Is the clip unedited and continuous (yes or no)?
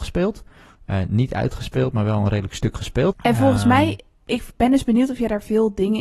no